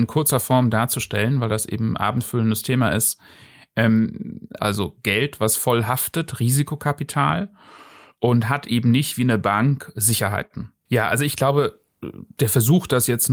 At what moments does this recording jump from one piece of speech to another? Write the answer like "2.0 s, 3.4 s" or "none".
4.6 s, 10.9 s, 12.4 s